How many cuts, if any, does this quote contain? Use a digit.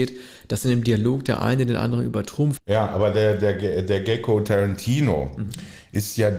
1